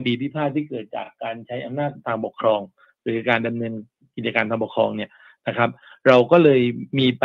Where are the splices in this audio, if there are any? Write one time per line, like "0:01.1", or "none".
none